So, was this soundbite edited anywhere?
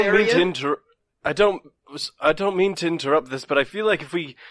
no; 0 cuts

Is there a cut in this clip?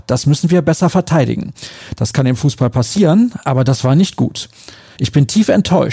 yes; 1 cut; at 5.0 s

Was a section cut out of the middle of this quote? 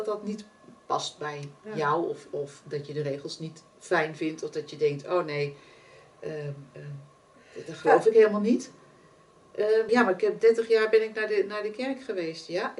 yes; 1 cut; at 9.9 s

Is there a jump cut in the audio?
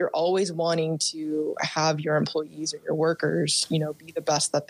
no; 0 cuts

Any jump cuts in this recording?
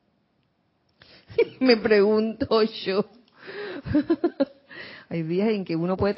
yes; 1 cut; at 1.3 s

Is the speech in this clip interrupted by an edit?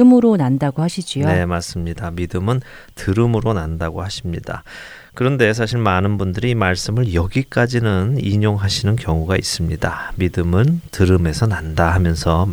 no; 0 cuts

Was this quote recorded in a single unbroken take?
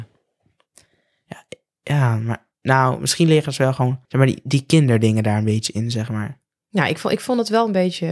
no; 1 cut; at 4.0 s

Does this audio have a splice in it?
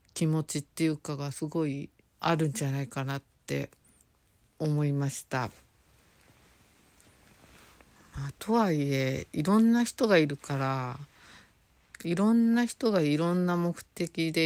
yes; 1 cut; at 2.0 s

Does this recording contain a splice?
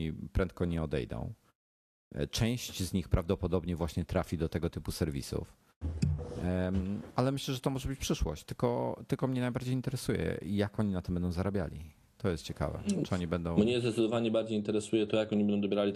no; 0 cuts

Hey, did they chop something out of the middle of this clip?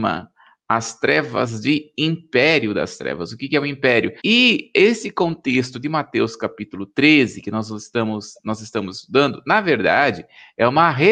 yes; 1 cut; at 4.2 s

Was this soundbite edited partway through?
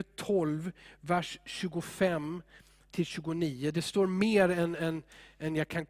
no; 0 cuts

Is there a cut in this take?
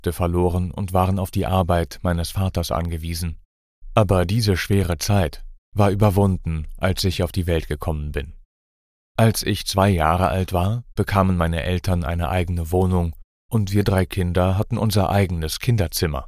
no; 0 cuts

